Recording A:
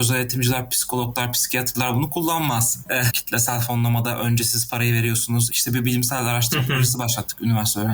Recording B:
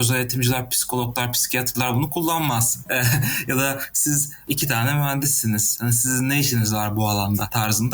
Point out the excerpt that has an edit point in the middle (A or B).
A